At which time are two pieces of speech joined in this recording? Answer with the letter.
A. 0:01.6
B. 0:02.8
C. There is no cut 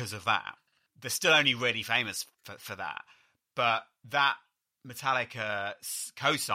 C